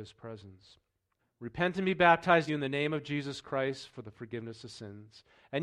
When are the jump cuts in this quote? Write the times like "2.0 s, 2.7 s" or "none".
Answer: 1.2 s, 2.5 s